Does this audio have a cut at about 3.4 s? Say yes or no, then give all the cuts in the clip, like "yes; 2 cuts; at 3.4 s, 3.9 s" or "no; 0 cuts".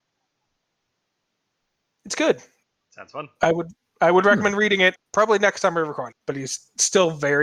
no; 2 cuts; at 4.9 s, 6.1 s